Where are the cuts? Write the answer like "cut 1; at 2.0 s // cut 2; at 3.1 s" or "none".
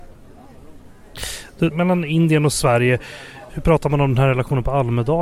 cut 1; at 1.7 s